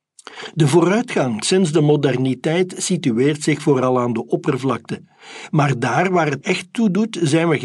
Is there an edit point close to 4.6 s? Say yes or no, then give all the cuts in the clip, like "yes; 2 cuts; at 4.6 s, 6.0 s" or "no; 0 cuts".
no; 1 cut; at 6.4 s